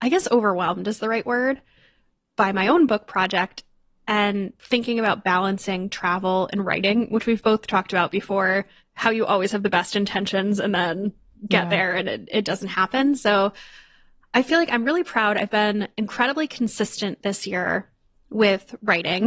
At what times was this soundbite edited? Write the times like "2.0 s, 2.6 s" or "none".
none